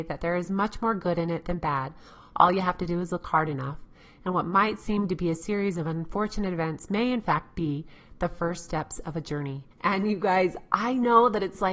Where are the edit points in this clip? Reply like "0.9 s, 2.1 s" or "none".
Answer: 9.7 s